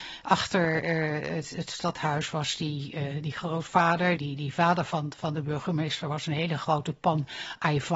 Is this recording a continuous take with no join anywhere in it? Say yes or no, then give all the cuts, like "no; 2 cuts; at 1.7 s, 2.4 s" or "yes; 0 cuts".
no; 1 cut; at 4.2 s